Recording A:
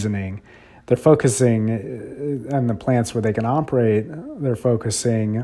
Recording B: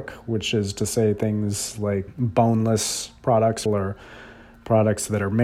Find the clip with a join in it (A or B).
B